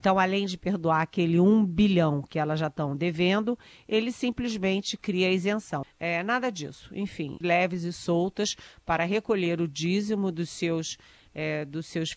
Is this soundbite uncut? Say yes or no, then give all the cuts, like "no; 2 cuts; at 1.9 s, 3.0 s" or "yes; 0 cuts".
no; 2 cuts; at 5.8 s, 7.4 s